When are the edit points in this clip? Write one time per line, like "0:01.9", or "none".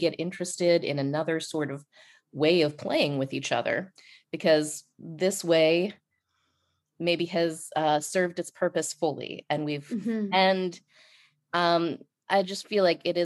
0:10.3
0:12.2